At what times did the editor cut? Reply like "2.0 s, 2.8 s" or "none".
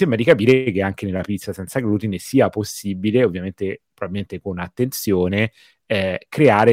none